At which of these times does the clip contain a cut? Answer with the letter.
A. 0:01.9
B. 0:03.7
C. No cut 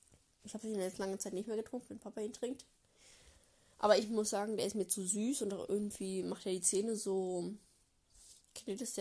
A